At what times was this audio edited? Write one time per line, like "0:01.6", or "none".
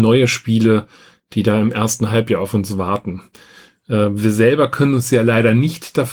none

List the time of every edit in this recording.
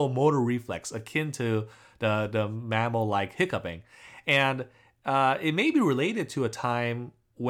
none

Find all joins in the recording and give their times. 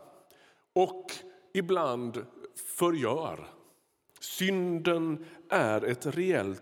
none

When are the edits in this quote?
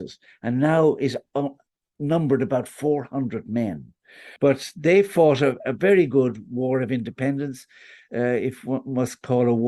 0:04.4

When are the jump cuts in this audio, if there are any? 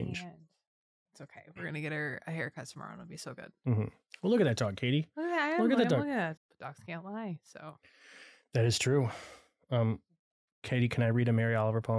0:06.4

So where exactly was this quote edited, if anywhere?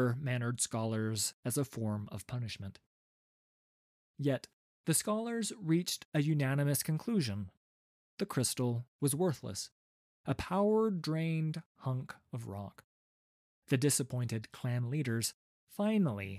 0:04.8

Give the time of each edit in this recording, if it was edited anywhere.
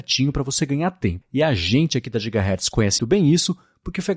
0:01.2
0:03.0

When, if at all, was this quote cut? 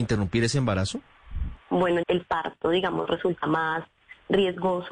0:02.0

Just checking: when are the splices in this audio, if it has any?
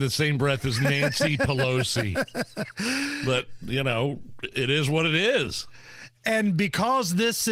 none

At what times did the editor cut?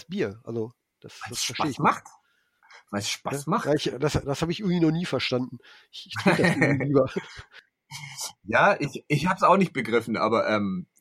none

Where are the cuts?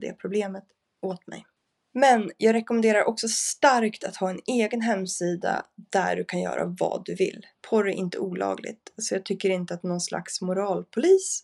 0:07.5

